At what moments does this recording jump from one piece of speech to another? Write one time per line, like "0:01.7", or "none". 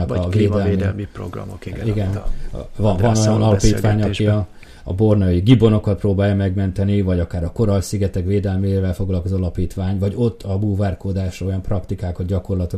none